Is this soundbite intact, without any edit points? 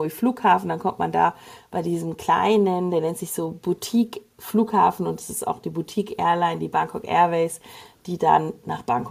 yes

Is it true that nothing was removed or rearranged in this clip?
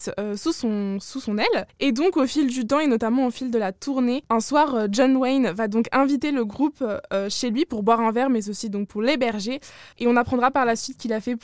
no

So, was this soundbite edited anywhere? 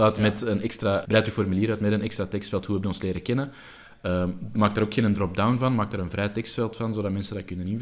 yes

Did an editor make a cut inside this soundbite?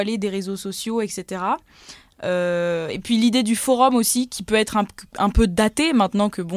no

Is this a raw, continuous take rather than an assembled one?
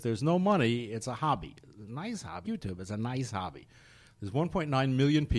no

